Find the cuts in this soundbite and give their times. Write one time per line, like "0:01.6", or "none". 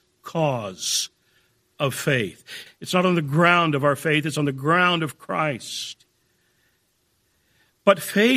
0:02.7